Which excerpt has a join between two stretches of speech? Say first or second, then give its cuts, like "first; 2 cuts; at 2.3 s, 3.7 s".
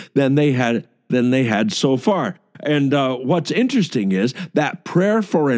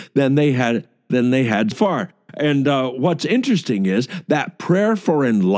second; 1 cut; at 1.7 s